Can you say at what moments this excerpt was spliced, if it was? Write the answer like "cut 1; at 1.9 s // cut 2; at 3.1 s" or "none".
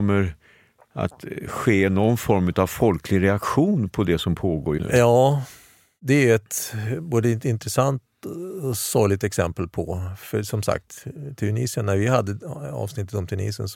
cut 1; at 4.8 s